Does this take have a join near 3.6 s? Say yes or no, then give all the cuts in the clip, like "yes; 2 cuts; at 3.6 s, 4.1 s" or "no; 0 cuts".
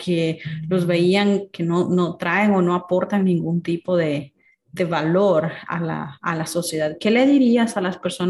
no; 0 cuts